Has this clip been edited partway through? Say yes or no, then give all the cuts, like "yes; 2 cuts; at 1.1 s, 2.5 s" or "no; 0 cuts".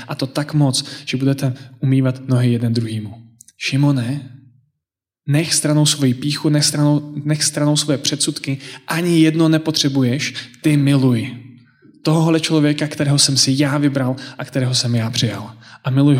no; 0 cuts